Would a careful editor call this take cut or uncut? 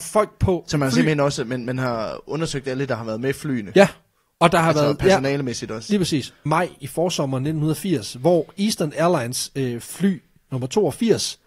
cut